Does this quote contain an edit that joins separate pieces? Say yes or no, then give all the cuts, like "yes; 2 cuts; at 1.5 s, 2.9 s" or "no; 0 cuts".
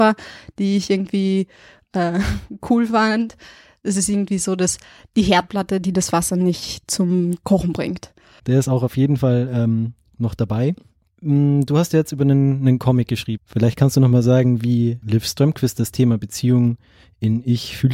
yes; 3 cuts; at 8.4 s, 13.4 s, 15.0 s